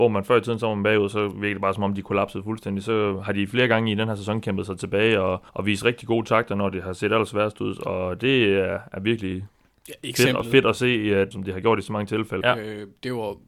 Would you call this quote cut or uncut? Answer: cut